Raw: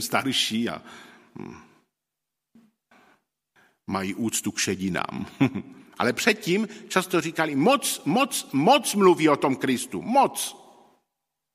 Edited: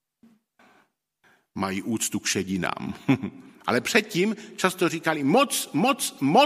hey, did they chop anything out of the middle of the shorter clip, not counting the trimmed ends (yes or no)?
no